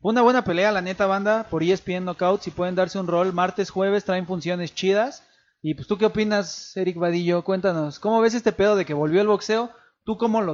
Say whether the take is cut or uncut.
uncut